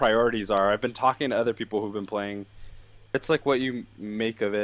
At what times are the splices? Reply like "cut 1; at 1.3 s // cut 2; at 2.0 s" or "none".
cut 1; at 3.1 s